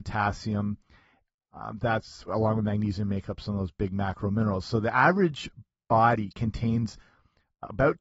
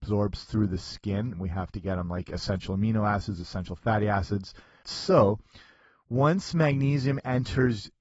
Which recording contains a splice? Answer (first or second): second